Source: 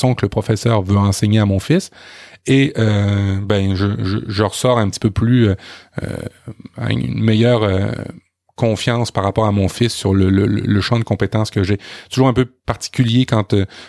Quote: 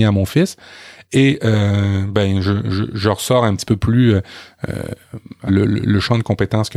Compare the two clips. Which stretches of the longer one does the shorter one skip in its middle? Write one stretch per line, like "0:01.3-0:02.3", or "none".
0:06.8-0:10.3